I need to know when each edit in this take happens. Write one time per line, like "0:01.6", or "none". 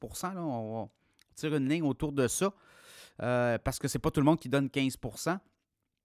none